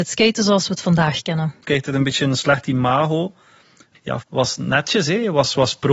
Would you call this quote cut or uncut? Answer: cut